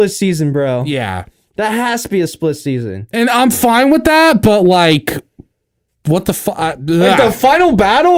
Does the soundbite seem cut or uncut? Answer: uncut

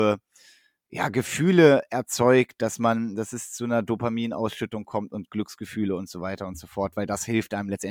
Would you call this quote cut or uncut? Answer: uncut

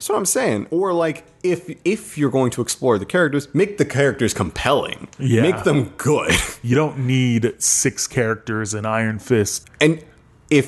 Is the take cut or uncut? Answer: cut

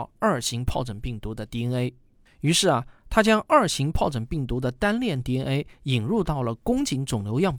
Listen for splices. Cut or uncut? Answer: uncut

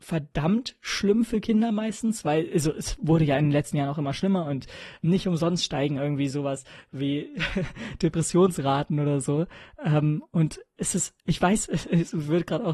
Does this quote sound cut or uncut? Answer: uncut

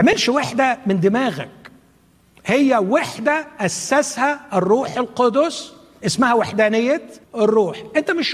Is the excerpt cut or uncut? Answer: cut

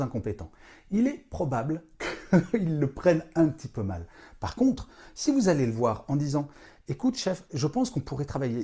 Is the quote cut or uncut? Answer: uncut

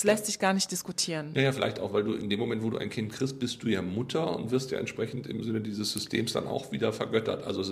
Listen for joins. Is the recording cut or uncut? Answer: uncut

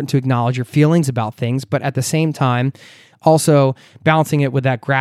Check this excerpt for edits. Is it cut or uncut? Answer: uncut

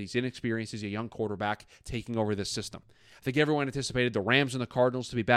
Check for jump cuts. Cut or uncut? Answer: uncut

